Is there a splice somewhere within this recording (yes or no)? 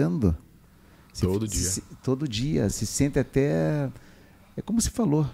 no